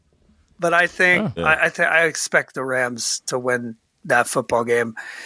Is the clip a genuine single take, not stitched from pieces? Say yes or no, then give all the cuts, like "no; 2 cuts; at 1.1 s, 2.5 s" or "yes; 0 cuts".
no; 1 cut; at 1.4 s